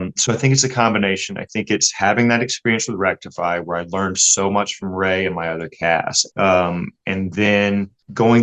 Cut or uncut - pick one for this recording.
cut